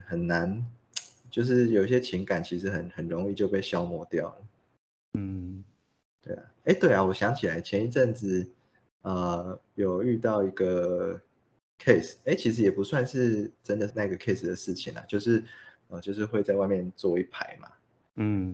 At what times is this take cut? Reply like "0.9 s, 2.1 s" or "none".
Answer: 13.9 s, 15.8 s